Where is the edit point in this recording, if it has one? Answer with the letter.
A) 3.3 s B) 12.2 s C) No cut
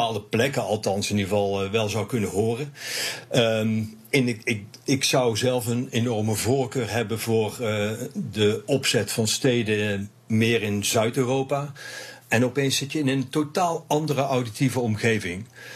B